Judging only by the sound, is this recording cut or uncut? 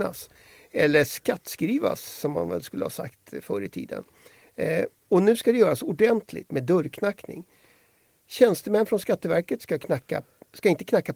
cut